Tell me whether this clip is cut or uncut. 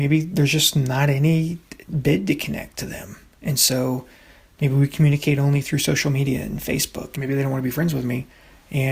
cut